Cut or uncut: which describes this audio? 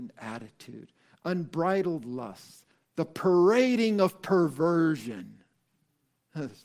cut